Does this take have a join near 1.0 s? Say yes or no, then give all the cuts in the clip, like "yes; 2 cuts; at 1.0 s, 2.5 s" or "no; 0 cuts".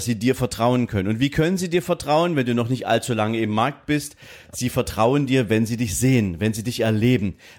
no; 0 cuts